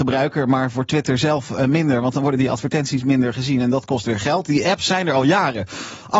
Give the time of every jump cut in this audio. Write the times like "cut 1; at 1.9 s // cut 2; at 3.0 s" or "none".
none